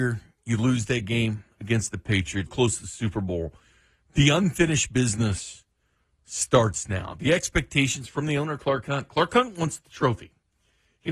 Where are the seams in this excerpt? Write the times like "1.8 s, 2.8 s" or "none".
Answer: 2.5 s